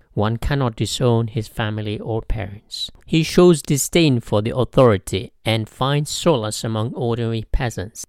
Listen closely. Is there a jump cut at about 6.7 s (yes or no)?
no